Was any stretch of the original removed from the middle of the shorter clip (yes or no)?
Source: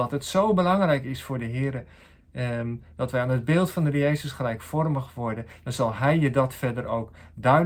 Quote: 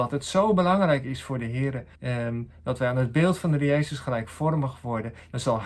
yes